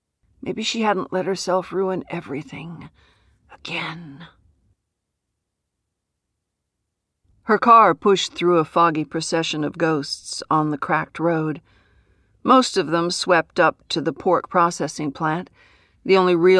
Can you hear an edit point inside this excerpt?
no; 0 cuts

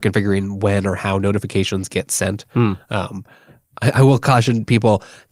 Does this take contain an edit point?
no; 0 cuts

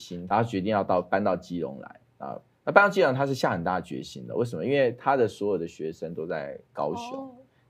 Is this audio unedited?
yes; 0 cuts

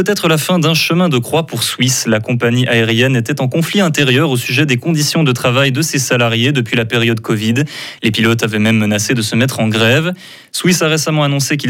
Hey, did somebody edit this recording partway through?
no; 0 cuts

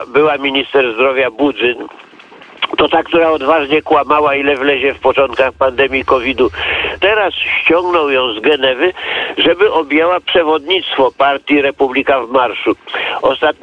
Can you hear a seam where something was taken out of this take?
yes; 1 cut; at 7.0 s

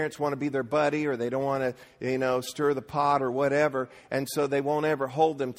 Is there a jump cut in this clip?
no; 0 cuts

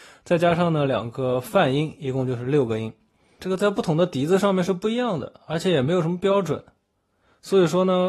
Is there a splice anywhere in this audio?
yes; 1 cut; at 3.4 s

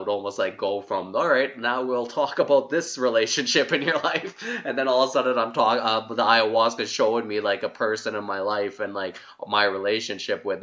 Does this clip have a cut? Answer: no; 0 cuts

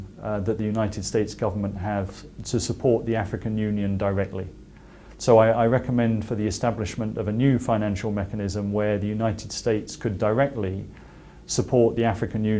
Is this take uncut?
yes; 0 cuts

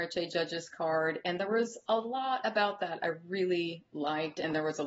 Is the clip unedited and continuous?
yes; 0 cuts

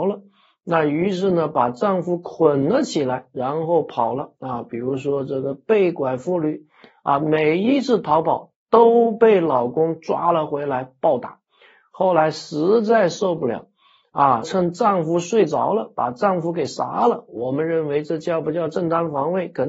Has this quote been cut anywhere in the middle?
yes; 1 cut; at 14.4 s

